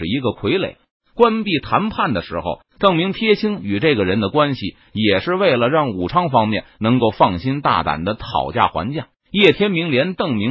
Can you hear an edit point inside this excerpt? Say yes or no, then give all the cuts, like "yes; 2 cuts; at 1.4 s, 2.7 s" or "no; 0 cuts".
yes; 2 cuts; at 2.6 s, 9.1 s